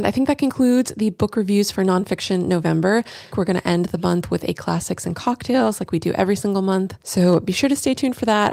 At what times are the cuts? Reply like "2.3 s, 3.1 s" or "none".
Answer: 3.3 s